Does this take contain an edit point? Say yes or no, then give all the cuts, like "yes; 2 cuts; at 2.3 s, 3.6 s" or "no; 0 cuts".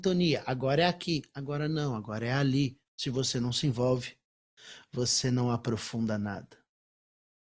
yes; 1 cut; at 2.9 s